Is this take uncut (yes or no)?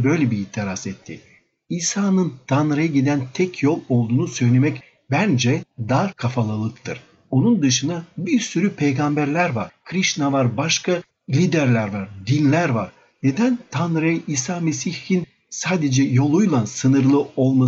yes